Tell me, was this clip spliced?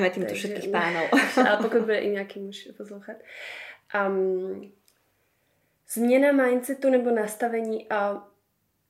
no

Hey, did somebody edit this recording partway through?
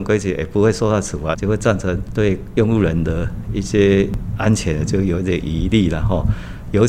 yes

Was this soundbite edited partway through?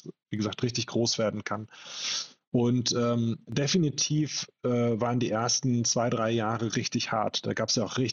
no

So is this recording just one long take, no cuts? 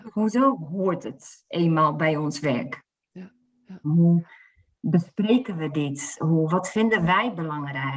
no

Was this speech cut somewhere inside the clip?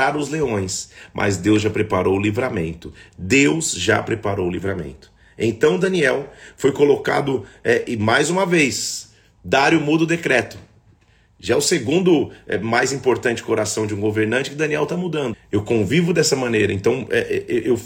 yes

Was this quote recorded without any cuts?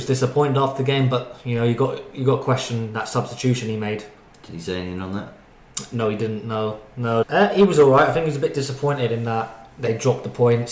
no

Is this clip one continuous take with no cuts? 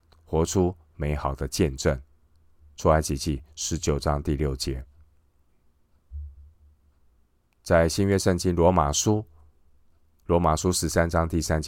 yes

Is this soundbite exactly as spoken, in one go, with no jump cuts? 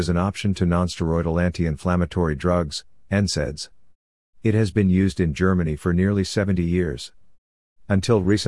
yes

